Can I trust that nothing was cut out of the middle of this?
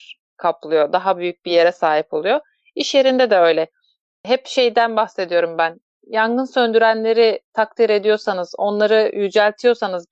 yes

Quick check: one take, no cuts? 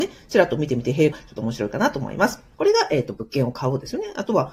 no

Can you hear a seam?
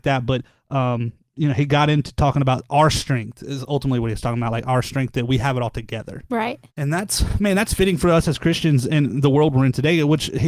yes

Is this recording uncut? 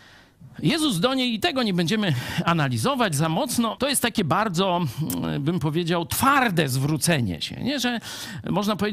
no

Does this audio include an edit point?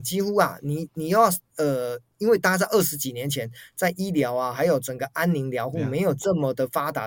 no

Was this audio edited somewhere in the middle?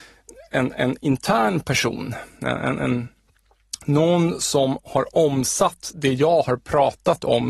no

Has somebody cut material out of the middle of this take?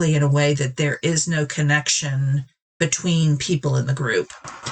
no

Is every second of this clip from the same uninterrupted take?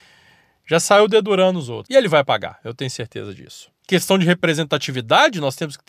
no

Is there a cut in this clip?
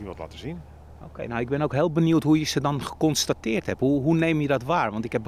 no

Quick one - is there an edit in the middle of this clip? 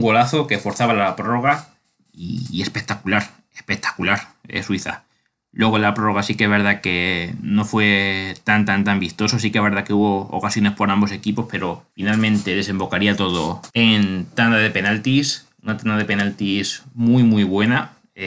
yes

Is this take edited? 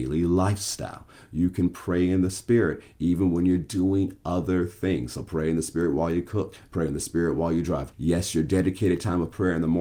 yes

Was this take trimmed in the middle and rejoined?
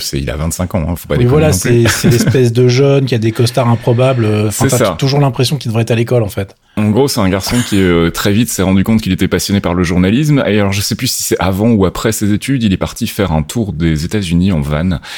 no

